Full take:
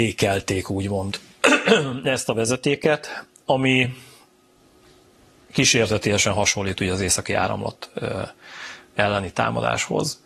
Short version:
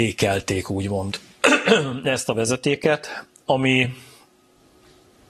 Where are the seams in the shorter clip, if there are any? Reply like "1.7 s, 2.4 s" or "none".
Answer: none